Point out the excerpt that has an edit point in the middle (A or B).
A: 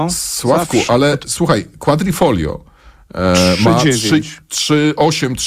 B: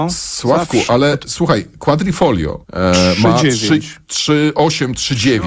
B